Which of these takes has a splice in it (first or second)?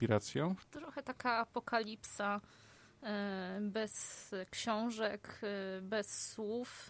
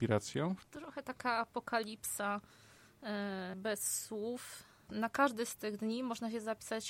second